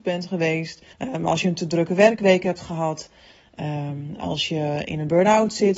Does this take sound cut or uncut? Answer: cut